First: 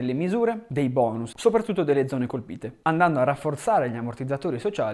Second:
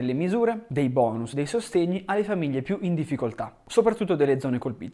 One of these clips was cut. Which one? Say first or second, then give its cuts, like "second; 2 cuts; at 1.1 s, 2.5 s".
first; 1 cut; at 1.3 s